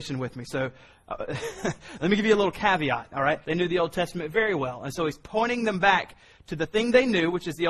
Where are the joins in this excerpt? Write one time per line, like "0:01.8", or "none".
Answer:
0:03.4